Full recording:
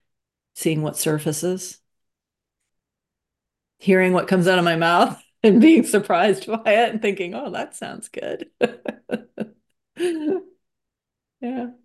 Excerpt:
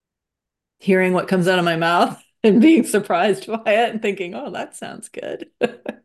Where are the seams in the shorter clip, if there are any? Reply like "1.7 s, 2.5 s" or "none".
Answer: none